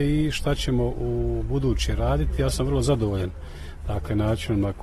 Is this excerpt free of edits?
yes; 0 cuts

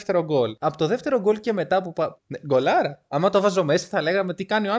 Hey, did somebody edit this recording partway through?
yes; 1 cut; at 2.2 s

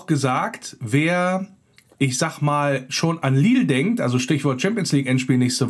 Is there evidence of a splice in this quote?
no; 0 cuts

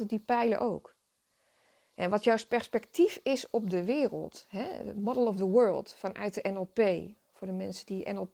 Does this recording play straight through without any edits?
yes; 0 cuts

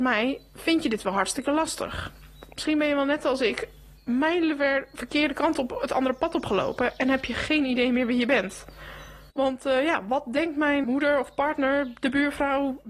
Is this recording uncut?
no; 2 cuts; at 9.3 s, 10.8 s

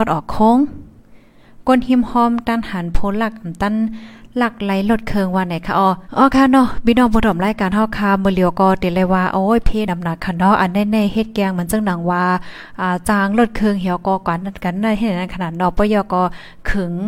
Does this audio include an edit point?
yes; 2 cuts; at 6.0 s, 9.9 s

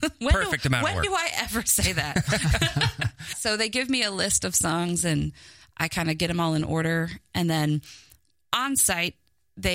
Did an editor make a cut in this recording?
yes; 1 cut; at 3.3 s

